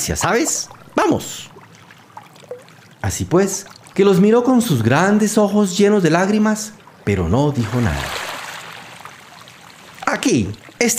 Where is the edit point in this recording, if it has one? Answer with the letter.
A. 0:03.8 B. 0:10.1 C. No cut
A